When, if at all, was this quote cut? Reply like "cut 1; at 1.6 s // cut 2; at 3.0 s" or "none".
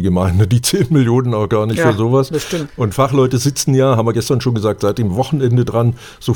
cut 1; at 2.7 s